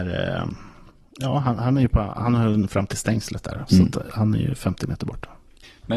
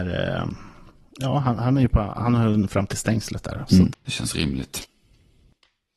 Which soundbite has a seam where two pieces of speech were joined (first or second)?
second